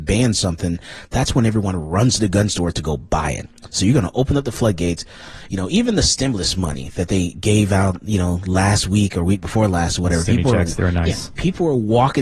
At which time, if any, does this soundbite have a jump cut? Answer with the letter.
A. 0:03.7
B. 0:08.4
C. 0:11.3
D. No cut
D